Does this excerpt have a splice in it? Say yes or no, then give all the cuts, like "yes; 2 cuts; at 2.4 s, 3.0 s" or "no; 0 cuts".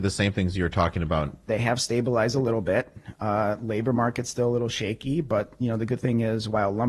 yes; 1 cut; at 1.5 s